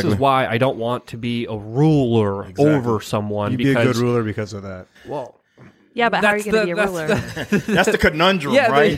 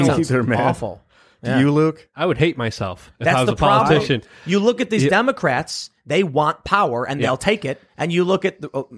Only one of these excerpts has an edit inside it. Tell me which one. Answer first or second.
first